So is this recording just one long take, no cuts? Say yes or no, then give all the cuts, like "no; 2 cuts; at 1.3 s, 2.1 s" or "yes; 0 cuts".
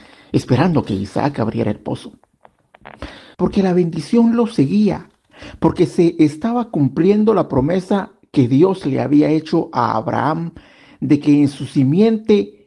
no; 1 cut; at 3.3 s